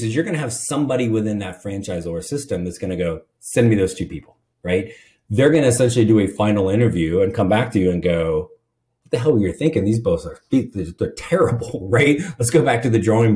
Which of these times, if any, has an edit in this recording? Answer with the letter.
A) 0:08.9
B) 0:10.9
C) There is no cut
C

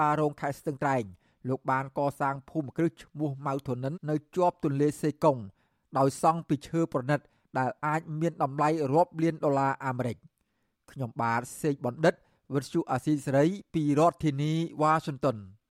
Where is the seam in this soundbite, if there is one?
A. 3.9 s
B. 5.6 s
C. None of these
A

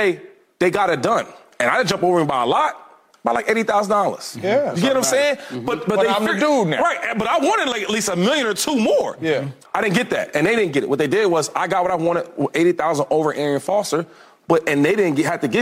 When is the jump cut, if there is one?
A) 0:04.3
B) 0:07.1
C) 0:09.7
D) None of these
C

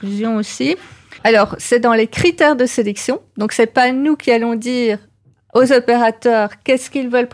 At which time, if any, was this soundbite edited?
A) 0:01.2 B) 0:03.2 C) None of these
A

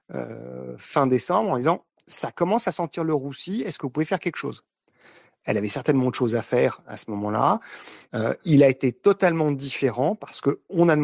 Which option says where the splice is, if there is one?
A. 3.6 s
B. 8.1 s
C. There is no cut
B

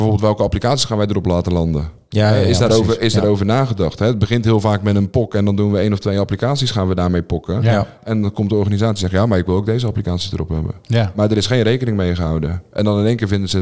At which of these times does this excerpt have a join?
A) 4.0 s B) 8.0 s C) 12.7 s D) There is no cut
B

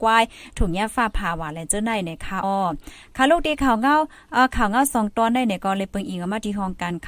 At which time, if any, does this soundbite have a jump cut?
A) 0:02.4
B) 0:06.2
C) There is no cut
A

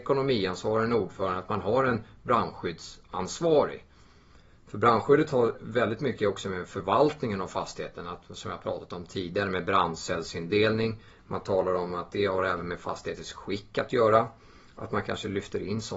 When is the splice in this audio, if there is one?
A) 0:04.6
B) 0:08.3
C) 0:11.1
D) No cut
D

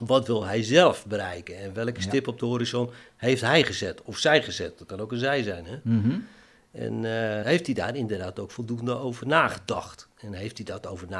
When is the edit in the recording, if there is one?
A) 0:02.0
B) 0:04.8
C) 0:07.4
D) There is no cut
C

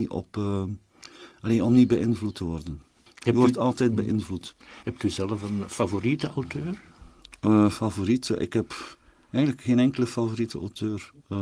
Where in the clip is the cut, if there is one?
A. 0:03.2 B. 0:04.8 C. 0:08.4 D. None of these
B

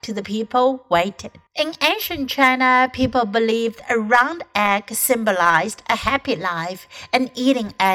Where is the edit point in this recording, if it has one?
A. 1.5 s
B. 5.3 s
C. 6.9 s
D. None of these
A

